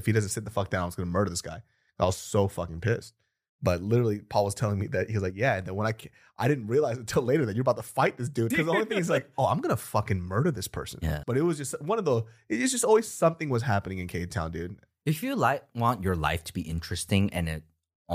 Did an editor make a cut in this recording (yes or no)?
yes